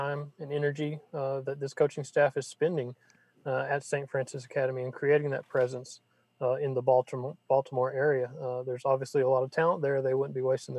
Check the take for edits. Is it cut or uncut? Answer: uncut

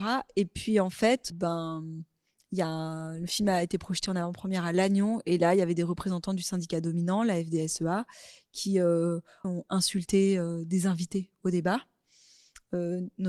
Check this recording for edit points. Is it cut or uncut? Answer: cut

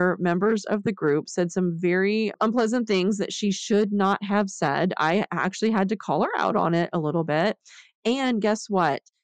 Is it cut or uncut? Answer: uncut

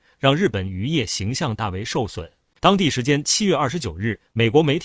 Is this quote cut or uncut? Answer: cut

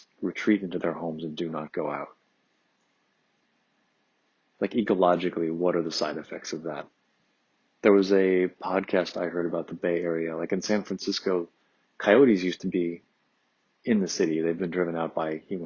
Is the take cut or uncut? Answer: uncut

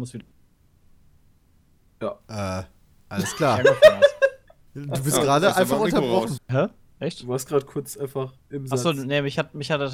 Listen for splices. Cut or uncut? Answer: cut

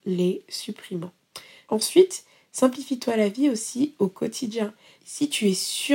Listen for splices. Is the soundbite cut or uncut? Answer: cut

